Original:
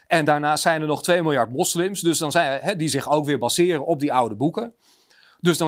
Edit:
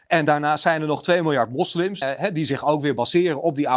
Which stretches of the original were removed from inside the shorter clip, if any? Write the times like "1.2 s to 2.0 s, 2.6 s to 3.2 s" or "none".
2.0 s to 2.5 s